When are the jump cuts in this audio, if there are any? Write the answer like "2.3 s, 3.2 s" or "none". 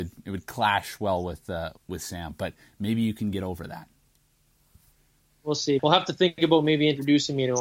1.8 s, 5.8 s

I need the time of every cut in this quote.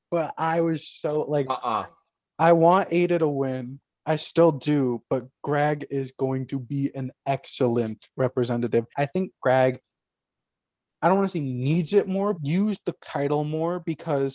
8.9 s, 12.4 s

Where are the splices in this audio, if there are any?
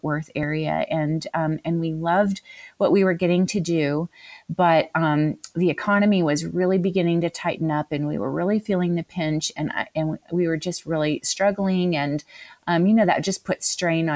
none

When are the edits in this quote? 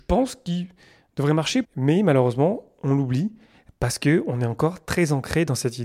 1.6 s

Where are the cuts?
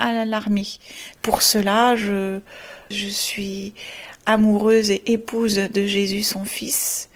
1.2 s

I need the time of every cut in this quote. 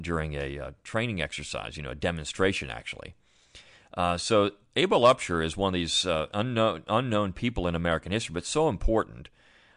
none

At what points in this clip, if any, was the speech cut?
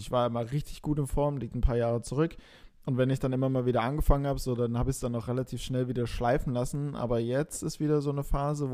none

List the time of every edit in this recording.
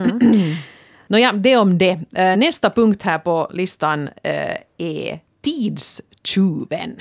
none

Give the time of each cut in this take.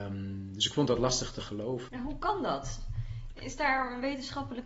1.9 s

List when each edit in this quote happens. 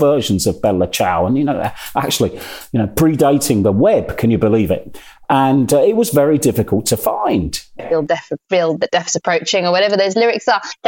7.8 s

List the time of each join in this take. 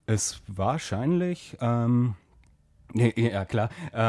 none

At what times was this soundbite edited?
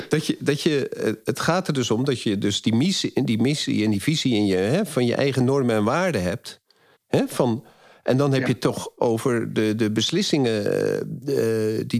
6.9 s

